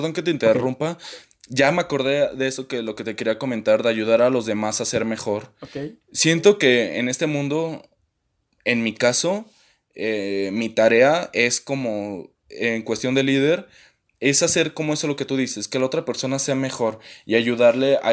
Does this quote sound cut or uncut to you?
uncut